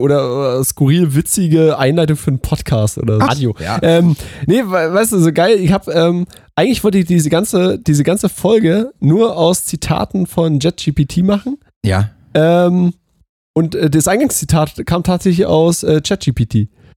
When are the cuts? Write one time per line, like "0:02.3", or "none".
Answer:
0:03.3